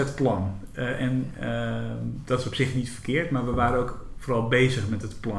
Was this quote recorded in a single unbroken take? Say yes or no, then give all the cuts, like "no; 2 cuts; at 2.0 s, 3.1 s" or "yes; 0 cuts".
yes; 0 cuts